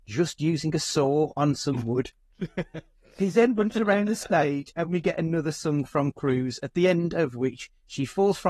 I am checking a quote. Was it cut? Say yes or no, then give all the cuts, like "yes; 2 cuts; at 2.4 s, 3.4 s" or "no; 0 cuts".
no; 0 cuts